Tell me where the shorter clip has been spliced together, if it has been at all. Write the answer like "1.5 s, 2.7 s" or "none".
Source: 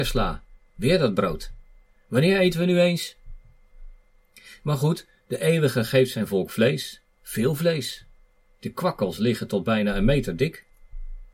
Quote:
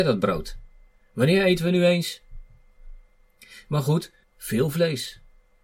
4.2 s